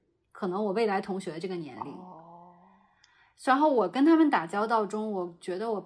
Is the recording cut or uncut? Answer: uncut